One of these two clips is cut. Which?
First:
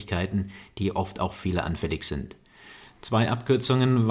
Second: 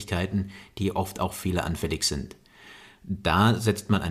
first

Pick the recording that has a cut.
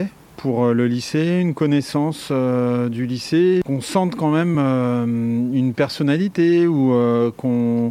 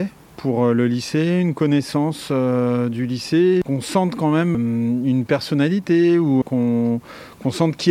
second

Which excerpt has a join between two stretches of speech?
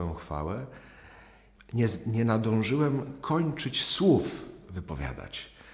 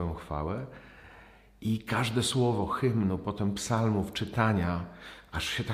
first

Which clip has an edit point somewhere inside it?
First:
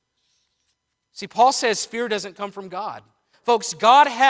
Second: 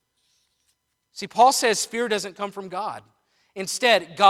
first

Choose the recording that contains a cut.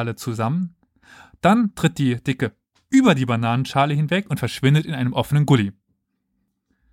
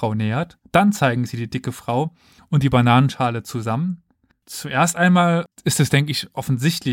second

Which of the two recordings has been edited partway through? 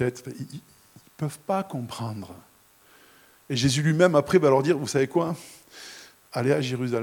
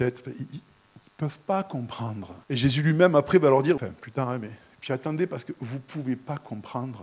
second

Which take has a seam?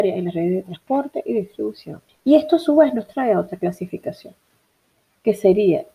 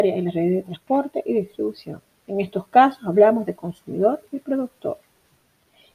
first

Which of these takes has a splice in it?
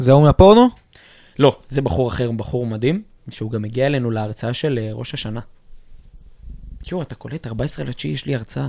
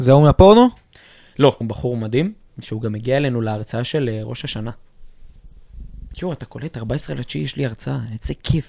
second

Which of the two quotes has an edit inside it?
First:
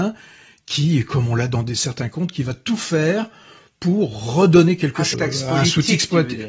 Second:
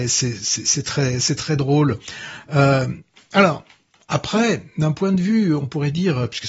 first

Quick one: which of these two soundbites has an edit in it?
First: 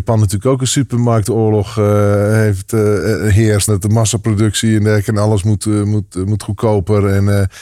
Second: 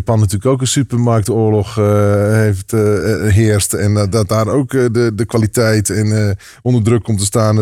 first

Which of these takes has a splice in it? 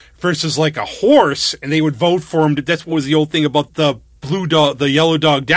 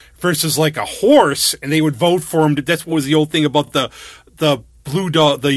first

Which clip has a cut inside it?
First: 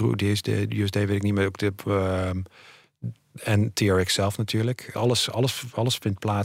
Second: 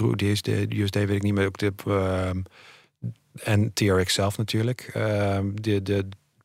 first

